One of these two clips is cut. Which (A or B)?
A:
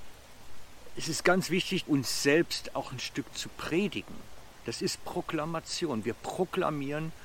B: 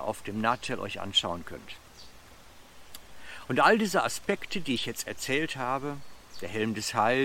A